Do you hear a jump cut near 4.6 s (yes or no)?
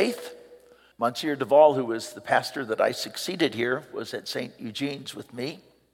no